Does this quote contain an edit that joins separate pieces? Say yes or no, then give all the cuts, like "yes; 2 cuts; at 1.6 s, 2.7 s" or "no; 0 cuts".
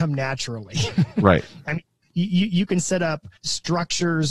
yes; 1 cut; at 3.4 s